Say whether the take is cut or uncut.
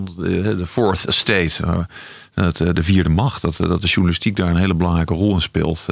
cut